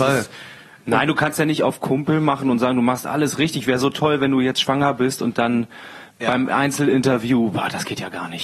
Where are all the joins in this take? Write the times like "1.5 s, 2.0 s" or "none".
none